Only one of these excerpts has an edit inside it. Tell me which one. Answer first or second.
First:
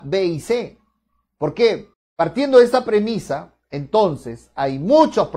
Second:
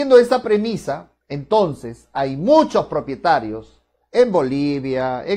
first